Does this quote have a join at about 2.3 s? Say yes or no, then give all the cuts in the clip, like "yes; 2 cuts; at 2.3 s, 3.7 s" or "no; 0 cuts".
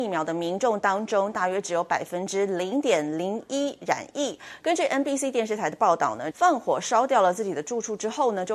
no; 2 cuts; at 4.6 s, 6.3 s